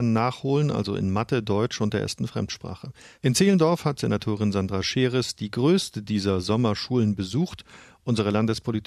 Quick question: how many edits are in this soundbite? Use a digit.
1